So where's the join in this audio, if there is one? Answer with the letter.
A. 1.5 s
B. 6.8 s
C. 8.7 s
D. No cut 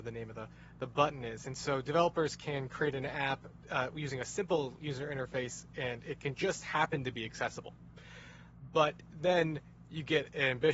D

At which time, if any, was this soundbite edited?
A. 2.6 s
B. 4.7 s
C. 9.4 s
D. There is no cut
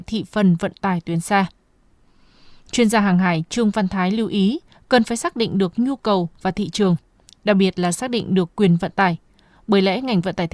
B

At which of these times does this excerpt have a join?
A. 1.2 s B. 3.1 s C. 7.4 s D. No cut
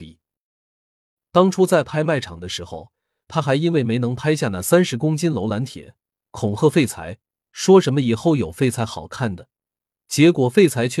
A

